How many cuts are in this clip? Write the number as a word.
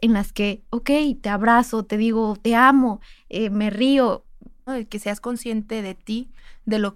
two